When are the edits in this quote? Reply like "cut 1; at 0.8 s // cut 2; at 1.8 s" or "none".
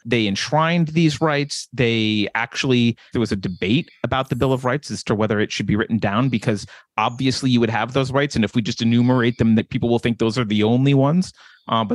cut 1; at 3.1 s // cut 2; at 9.6 s